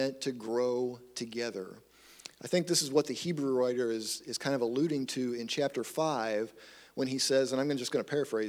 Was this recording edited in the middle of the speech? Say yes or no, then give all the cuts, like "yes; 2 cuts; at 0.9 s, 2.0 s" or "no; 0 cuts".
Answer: no; 0 cuts